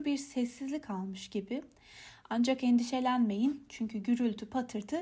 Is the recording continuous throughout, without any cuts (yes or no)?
yes